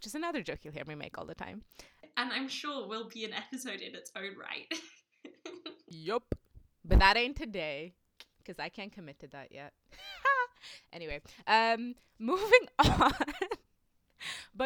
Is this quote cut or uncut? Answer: uncut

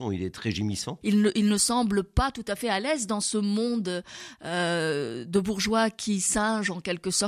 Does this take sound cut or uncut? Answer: cut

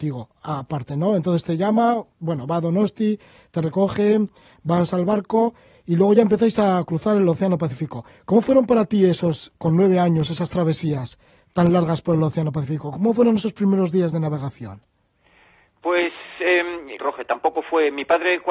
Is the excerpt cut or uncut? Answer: cut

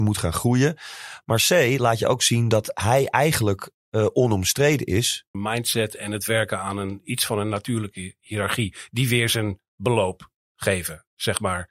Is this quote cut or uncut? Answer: cut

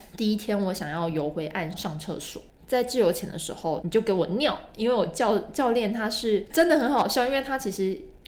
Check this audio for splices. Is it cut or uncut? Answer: cut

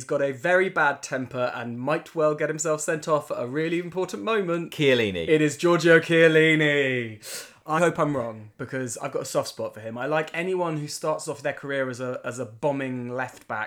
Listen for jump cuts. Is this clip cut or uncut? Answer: cut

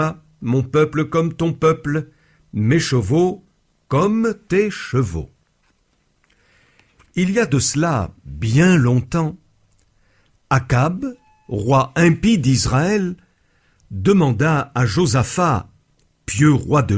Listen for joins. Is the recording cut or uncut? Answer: uncut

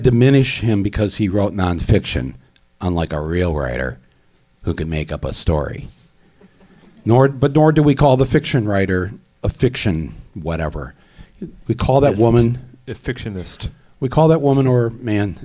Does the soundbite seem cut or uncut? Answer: uncut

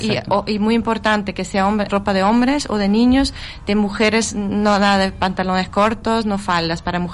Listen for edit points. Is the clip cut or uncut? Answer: cut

